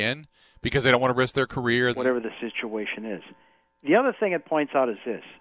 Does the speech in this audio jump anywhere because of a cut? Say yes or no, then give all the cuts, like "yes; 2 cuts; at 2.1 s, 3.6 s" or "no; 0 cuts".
yes; 1 cut; at 1.9 s